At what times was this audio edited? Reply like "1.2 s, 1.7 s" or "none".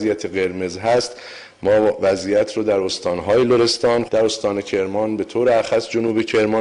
4.1 s